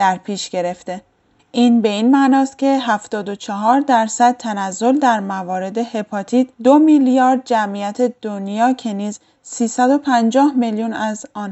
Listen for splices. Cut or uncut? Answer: cut